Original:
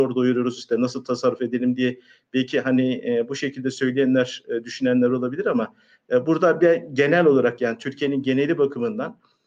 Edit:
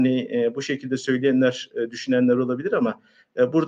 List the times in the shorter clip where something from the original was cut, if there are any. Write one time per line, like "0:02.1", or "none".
none